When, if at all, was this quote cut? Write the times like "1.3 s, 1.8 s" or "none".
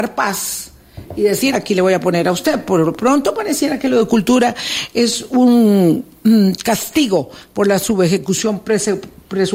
1.5 s